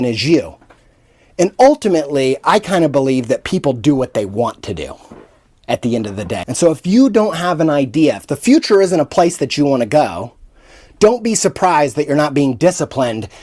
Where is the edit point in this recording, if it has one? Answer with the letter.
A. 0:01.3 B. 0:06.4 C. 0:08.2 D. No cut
B